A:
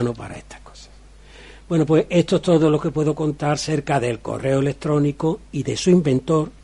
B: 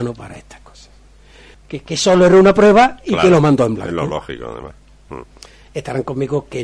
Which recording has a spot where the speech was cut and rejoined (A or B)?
B